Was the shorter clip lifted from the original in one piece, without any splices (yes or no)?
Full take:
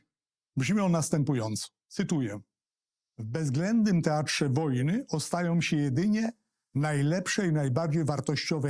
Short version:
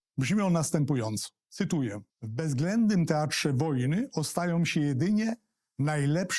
no